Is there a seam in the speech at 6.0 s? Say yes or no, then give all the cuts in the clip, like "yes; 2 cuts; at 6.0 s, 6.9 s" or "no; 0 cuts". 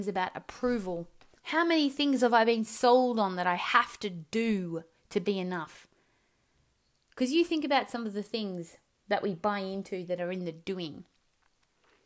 no; 1 cut; at 1.4 s